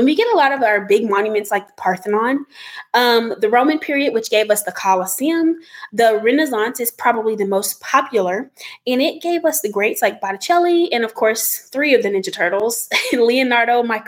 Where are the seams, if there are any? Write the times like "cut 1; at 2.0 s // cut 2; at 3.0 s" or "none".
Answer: cut 1; at 5.9 s